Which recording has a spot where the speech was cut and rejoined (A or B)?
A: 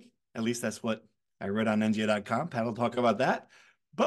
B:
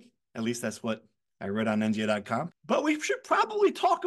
B